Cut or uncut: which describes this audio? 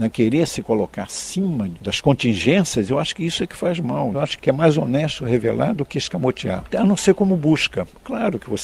cut